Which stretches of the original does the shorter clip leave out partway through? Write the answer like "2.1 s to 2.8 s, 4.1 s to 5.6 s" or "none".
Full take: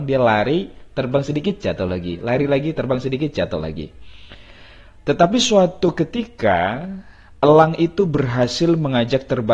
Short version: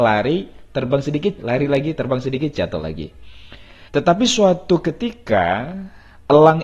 1.6 s to 2.2 s, 4.7 s to 5.0 s